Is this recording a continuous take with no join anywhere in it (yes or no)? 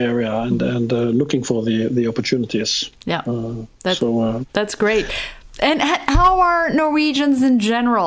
no